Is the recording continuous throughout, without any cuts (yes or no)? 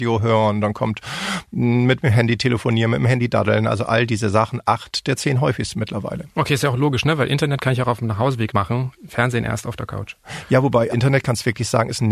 no